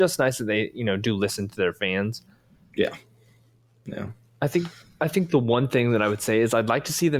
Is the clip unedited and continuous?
yes; 0 cuts

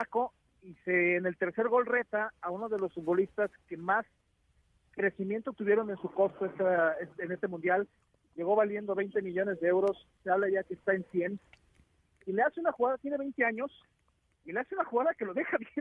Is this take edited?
no; 0 cuts

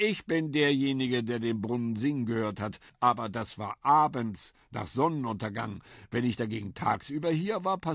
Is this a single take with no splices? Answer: yes; 0 cuts

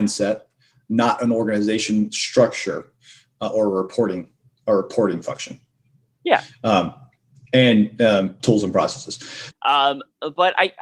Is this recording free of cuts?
no; 2 cuts; at 8.4 s, 9.5 s

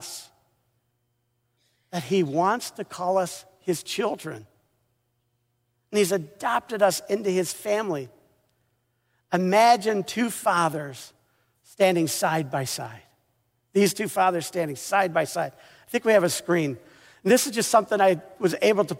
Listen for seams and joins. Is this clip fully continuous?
yes; 0 cuts

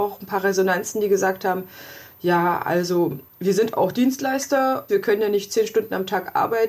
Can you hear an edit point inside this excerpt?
yes; 2 cuts; at 3.3 s, 4.9 s

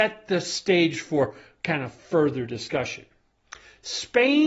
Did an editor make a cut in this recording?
no; 0 cuts

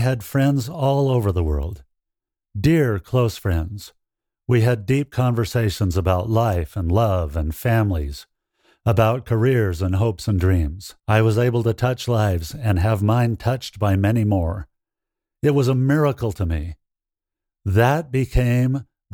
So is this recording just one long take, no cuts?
no; 1 cut; at 11.0 s

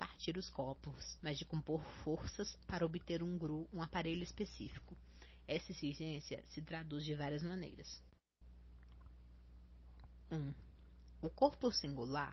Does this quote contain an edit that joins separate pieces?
yes; 1 cut; at 1.2 s

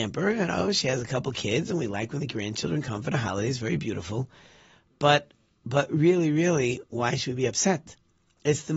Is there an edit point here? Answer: no; 0 cuts

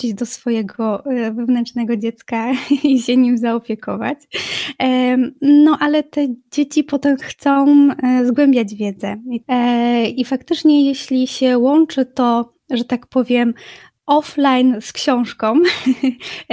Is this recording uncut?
yes; 0 cuts

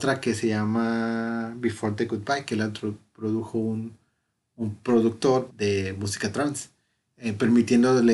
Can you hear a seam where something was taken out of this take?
yes; 2 cuts; at 5.5 s, 7.1 s

